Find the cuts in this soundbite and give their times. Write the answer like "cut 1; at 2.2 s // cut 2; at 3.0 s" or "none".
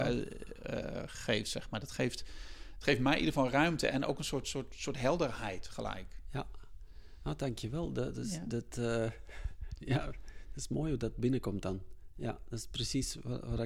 none